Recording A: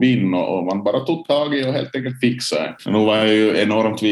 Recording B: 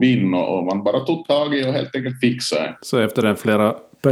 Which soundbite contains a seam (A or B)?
A